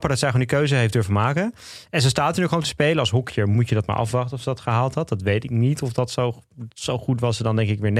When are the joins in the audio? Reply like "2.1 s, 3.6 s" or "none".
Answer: none